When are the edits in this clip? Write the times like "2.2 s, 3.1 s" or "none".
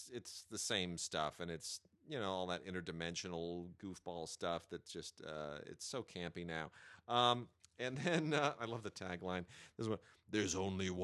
none